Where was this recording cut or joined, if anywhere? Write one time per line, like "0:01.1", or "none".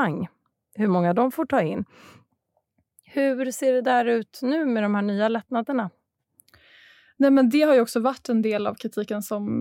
none